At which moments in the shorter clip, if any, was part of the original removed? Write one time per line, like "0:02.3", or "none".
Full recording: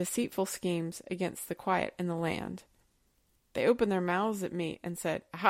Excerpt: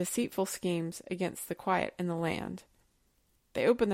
none